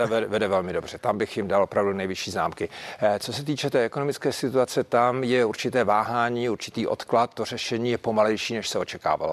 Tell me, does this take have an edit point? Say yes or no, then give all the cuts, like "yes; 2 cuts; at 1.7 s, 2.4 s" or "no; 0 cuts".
no; 0 cuts